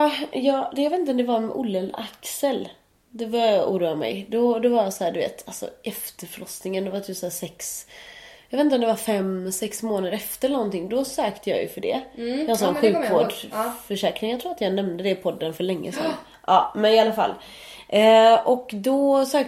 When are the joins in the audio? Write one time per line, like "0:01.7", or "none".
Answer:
none

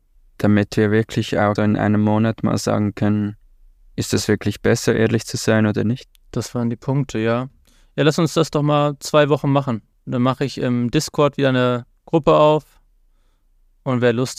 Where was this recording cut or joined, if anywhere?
0:01.6

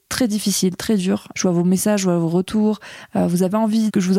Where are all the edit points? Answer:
0:01.3

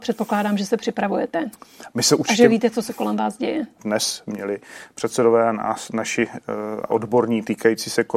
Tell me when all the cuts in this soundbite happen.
0:03.8
0:06.9

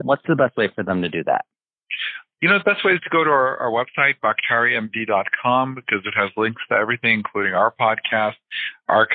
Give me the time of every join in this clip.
none

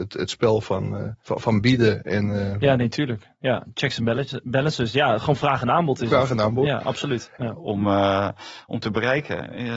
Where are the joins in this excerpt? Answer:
0:01.2
0:07.4

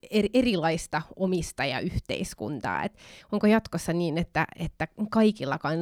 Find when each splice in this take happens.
none

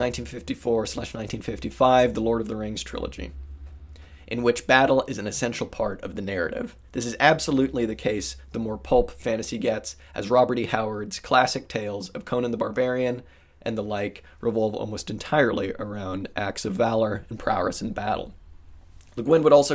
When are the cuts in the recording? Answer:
none

